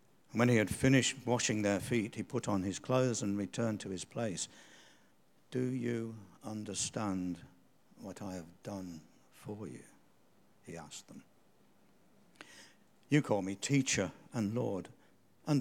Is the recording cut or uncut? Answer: uncut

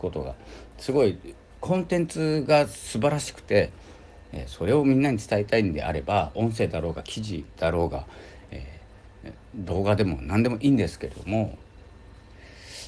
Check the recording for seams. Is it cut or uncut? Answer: uncut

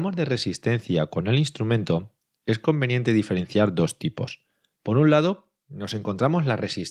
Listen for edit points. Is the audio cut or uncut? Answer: uncut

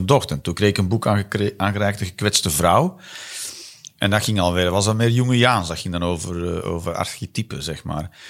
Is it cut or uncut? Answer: uncut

